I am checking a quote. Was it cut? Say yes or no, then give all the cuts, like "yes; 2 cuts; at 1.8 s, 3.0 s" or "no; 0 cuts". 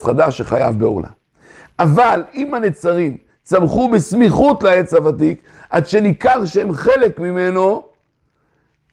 no; 0 cuts